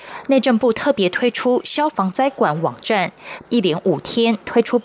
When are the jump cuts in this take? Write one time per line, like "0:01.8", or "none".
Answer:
0:01.9
0:03.4